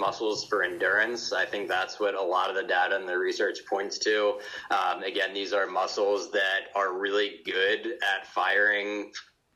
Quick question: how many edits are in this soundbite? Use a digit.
0